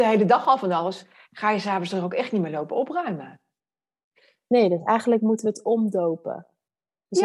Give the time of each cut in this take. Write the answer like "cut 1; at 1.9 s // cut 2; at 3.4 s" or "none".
none